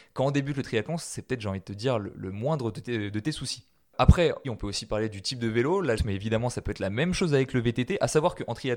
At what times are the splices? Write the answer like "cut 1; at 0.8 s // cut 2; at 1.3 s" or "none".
cut 1; at 4.4 s // cut 2; at 6.0 s